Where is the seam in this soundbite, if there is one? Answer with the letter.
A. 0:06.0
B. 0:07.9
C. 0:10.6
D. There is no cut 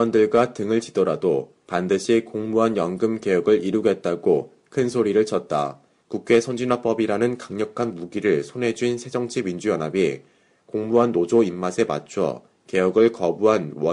A